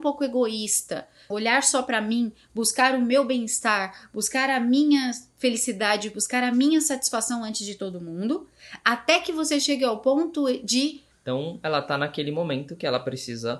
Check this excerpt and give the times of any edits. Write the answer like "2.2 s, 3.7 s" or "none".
1.3 s, 11.1 s

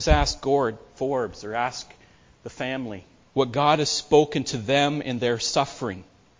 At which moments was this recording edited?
3.2 s

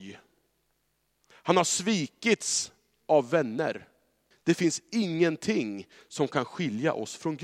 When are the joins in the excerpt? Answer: 1.3 s, 4.3 s

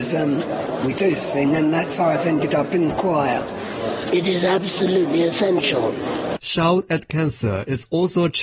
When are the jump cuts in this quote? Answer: 4.1 s, 6.4 s

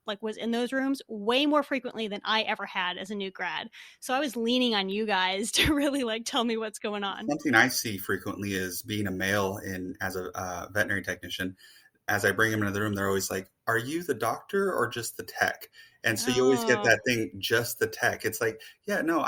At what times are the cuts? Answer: 13.6 s

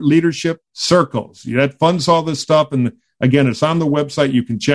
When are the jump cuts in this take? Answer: none

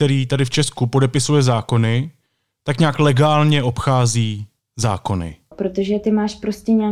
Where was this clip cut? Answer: 5.5 s

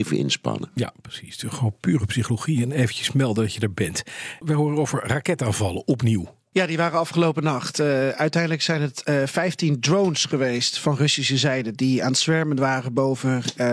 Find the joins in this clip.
4.4 s

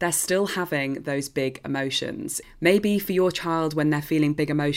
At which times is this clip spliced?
2.4 s

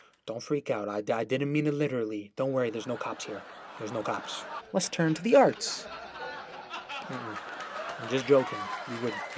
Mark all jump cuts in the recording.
4.6 s, 7.0 s

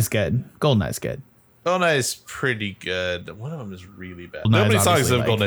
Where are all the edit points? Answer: 4.5 s

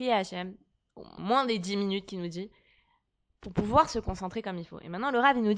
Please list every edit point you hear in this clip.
1.2 s

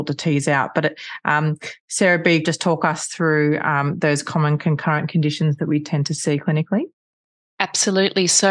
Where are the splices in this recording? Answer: 2.4 s

